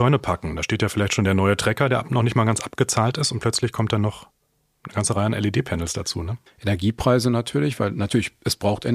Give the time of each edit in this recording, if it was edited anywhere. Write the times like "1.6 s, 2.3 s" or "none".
6.5 s